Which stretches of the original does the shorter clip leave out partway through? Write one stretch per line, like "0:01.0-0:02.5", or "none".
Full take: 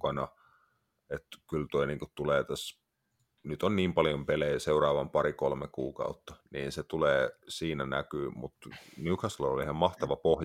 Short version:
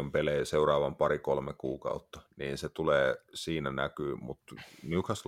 none